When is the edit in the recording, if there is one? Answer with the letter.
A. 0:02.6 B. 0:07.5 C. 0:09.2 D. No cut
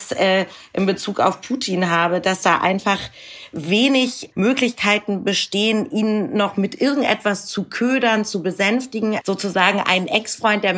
C